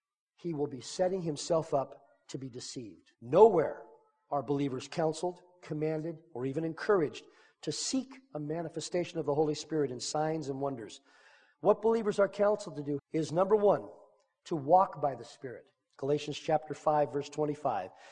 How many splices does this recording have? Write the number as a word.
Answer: two